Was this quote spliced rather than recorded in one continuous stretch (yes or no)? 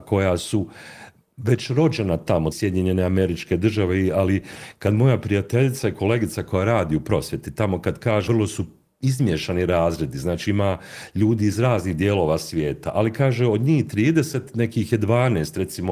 yes